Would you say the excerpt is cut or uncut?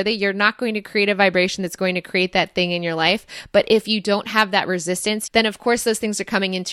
cut